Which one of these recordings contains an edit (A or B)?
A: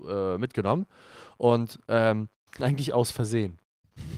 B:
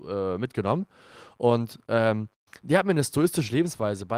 A